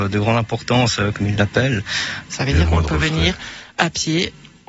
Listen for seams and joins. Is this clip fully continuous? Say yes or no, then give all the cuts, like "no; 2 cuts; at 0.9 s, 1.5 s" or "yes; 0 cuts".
no; 2 cuts; at 1.1 s, 2.3 s